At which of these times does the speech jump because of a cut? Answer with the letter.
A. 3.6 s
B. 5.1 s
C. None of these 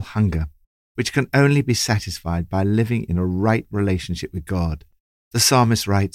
B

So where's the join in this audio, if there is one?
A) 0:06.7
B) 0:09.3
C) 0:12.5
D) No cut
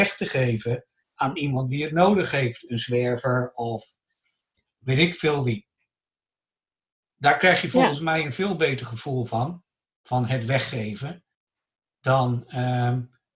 D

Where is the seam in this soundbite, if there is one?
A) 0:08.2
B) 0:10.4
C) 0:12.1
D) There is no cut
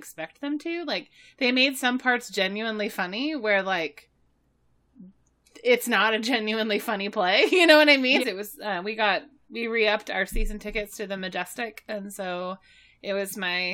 A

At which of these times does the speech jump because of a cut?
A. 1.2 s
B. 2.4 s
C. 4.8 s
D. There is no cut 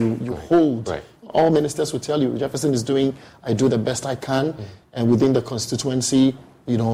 A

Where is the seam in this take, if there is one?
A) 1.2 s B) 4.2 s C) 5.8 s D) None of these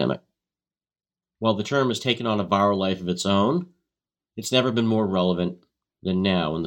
B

